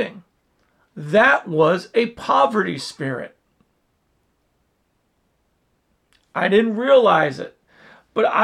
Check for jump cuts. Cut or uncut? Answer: cut